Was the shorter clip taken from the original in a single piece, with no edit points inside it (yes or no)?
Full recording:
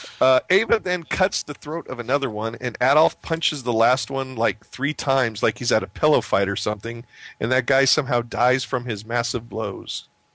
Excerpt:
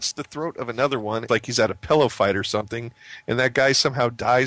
no